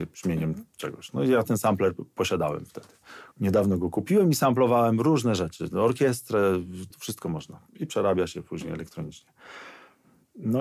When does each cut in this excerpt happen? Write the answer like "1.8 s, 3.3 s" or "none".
3.3 s, 6.9 s